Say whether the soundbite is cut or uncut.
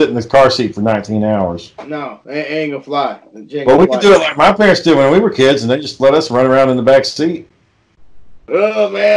uncut